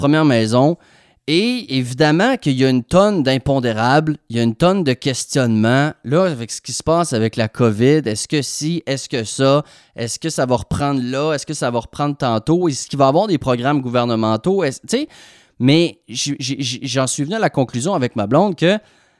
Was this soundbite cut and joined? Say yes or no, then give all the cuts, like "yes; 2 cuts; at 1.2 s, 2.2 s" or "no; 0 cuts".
no; 0 cuts